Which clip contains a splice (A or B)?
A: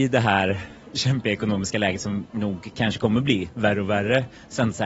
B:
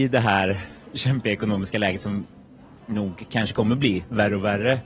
A